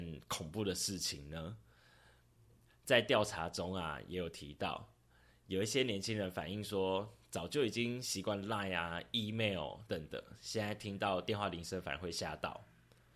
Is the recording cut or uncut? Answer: cut